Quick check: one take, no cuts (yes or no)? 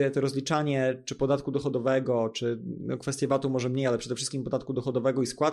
yes